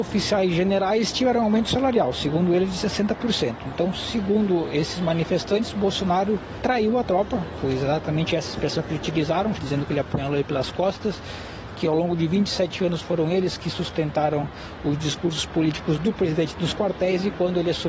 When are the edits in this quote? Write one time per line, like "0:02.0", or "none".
0:09.6